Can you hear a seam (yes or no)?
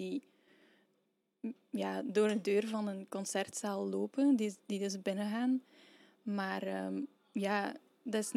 no